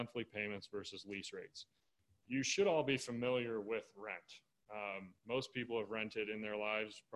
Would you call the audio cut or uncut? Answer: uncut